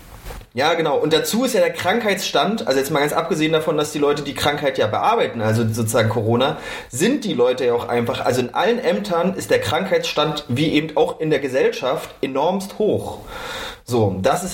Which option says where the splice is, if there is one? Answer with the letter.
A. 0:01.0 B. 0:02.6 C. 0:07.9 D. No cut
D